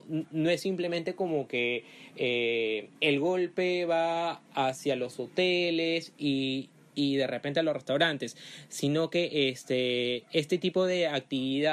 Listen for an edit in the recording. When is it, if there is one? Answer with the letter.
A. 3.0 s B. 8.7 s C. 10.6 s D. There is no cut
A